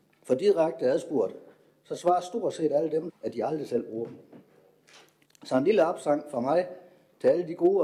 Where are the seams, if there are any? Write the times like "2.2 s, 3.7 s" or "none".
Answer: 3.1 s, 5.2 s